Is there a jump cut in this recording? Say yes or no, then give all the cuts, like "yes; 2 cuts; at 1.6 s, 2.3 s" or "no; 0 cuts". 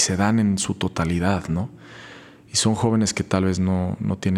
no; 0 cuts